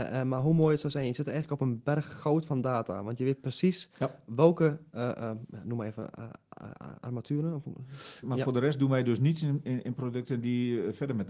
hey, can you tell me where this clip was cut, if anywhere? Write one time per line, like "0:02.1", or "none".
0:08.2